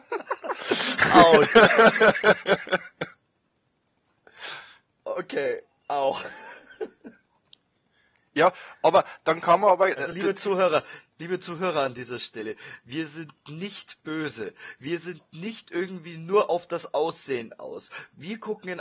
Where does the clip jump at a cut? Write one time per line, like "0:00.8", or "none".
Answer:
none